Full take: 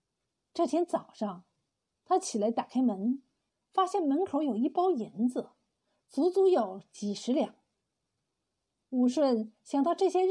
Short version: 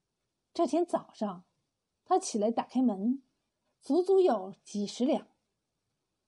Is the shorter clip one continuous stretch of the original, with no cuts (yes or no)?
no